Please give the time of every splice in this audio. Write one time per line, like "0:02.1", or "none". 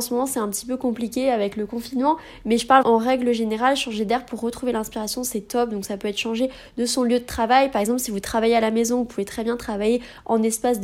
0:02.8